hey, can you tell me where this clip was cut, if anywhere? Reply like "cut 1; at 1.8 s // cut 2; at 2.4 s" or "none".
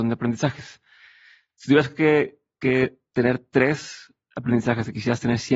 none